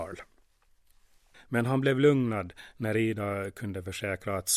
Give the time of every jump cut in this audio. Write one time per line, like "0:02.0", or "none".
0:01.3